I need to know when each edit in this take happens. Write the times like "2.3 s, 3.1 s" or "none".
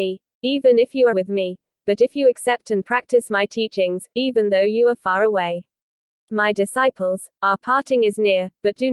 1.1 s, 4.1 s, 7.4 s